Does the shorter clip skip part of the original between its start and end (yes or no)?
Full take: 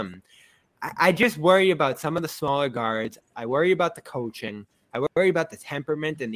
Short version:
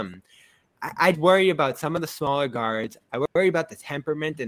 yes